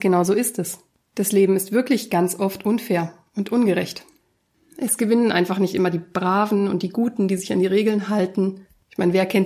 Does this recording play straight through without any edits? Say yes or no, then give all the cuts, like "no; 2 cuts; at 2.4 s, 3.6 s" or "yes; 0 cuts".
yes; 0 cuts